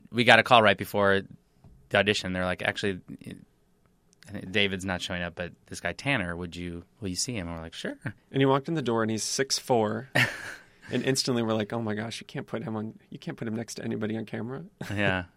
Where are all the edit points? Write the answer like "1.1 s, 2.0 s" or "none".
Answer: 6.9 s